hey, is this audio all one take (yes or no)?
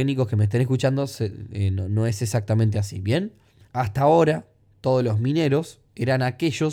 no